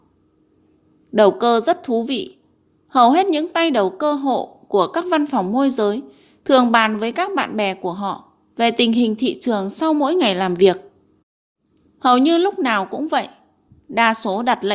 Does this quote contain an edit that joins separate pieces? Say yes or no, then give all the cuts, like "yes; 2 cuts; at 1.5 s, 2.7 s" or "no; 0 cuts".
yes; 1 cut; at 11.9 s